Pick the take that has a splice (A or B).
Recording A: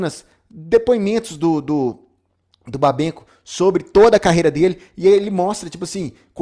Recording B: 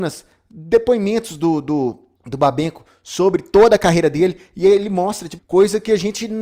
B